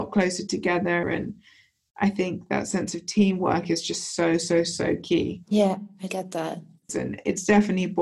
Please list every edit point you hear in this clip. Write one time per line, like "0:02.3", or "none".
0:01.0
0:06.9